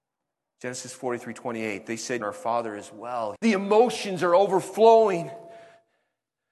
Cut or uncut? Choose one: cut